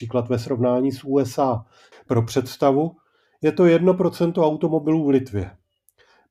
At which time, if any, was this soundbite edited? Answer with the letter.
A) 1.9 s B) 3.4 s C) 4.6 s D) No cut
A